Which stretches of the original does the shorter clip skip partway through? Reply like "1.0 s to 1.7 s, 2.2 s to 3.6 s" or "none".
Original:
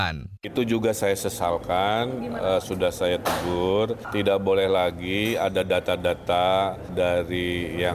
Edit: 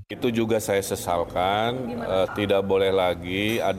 2.6 s to 4.0 s